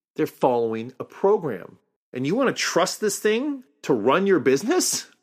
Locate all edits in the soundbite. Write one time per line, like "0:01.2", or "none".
0:02.0